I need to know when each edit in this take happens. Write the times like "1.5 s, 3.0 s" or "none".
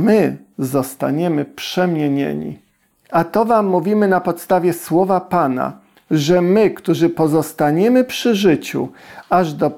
2.9 s